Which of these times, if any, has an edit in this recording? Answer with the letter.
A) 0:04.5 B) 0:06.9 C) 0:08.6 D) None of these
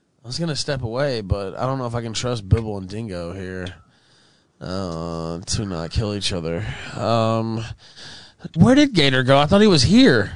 C